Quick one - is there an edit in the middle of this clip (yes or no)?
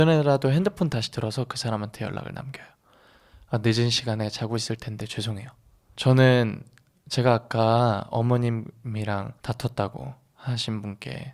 yes